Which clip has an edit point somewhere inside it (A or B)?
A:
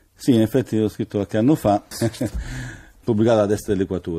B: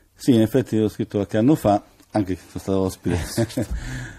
A